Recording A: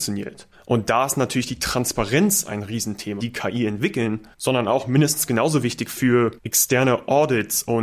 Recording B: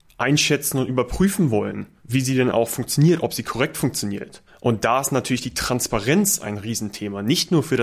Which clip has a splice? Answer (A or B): A